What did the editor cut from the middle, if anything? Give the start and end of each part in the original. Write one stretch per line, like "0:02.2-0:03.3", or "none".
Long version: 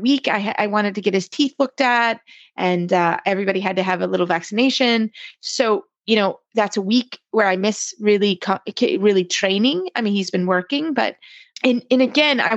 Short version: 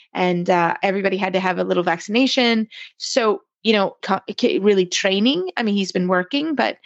0:06.4-0:08.4